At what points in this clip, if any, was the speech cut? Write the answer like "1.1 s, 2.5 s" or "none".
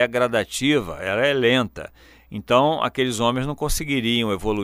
none